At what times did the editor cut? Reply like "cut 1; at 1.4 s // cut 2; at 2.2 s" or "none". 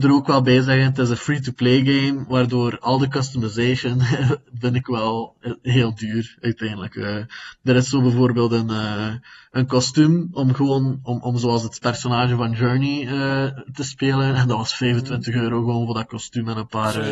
none